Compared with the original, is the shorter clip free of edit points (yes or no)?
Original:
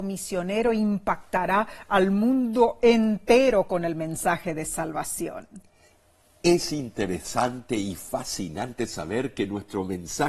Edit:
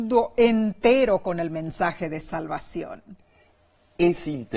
yes